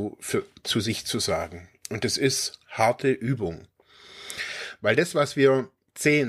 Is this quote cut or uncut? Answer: cut